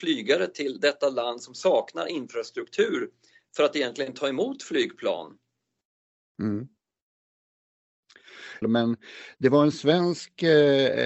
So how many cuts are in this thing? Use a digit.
1